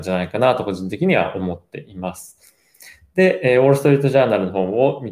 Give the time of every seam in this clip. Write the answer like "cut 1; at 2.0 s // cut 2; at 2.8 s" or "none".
none